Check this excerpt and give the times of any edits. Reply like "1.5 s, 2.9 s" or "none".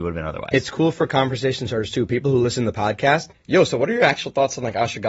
3.3 s